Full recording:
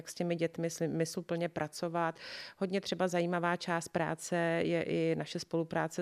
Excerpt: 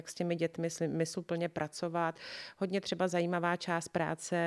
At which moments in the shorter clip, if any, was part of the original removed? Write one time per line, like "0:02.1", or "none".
none